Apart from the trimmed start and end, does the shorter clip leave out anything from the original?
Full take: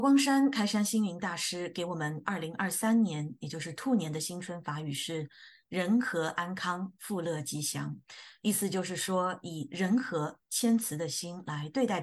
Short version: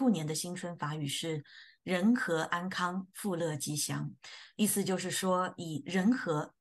no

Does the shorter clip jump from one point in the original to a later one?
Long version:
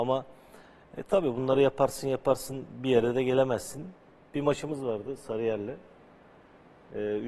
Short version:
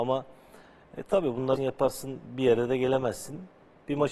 yes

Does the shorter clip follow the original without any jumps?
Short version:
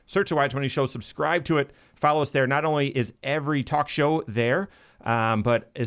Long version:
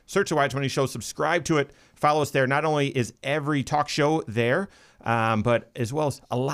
yes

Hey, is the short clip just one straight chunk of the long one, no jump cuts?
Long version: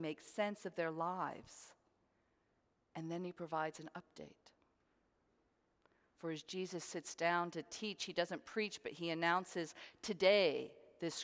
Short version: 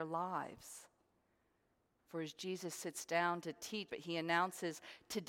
no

